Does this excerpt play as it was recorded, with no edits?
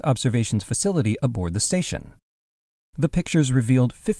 yes; 0 cuts

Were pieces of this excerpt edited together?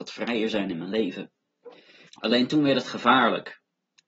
yes; 1 cut; at 2.1 s

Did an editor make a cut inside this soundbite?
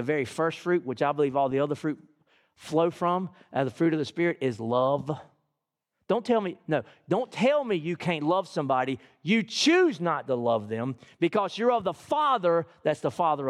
no; 0 cuts

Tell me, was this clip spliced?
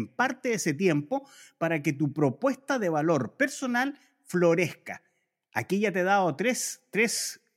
no; 0 cuts

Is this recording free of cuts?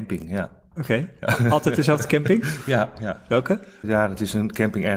yes; 0 cuts

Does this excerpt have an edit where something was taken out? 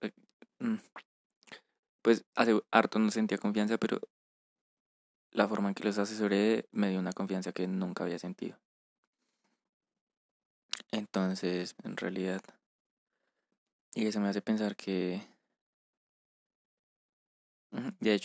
yes; 1 cut; at 11.8 s

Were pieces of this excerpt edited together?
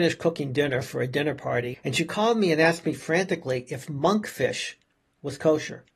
yes; 1 cut; at 1.7 s

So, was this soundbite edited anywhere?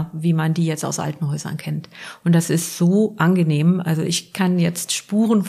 no; 0 cuts

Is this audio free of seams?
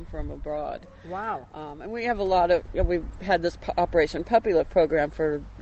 yes; 0 cuts

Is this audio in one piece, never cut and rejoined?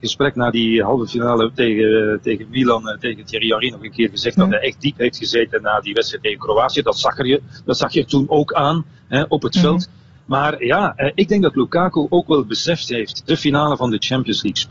no; 2 cuts; at 10.2 s, 13.2 s

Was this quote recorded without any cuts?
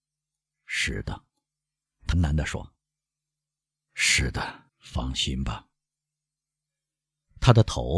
no; 2 cuts; at 2.1 s, 4.7 s

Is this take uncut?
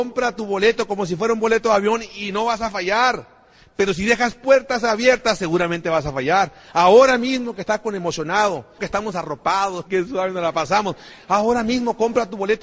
no; 2 cuts; at 8.8 s, 9.9 s

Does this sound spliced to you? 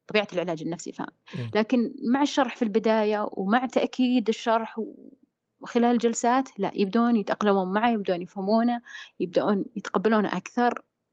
no; 0 cuts

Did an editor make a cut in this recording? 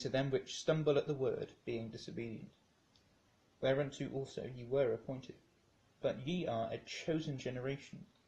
no; 0 cuts

